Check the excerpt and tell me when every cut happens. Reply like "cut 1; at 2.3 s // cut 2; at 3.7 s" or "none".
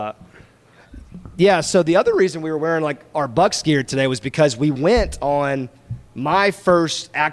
none